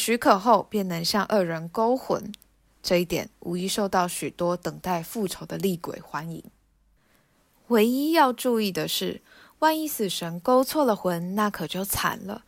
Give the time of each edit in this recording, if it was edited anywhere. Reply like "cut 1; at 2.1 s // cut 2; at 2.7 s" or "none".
none